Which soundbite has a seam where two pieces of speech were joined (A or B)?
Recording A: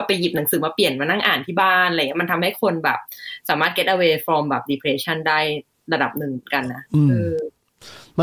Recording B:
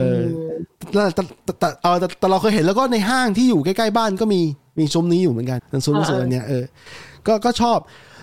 B